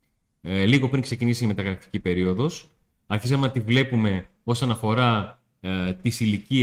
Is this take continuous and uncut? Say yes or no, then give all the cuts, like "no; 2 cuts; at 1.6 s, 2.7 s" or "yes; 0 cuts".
yes; 0 cuts